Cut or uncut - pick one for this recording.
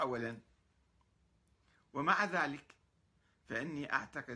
uncut